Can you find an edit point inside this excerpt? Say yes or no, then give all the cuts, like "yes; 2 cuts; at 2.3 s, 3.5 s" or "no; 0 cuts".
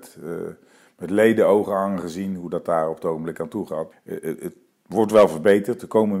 yes; 1 cut; at 3.9 s